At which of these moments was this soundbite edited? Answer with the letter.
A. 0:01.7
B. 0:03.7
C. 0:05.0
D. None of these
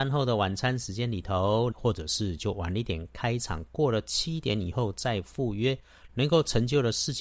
A